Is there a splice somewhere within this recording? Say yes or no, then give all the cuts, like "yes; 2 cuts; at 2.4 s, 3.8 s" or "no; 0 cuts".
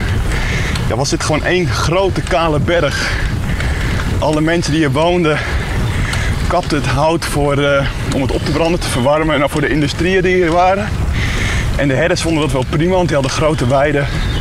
no; 0 cuts